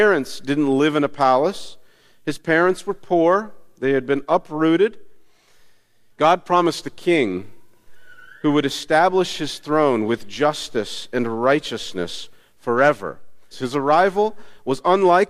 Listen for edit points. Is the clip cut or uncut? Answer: cut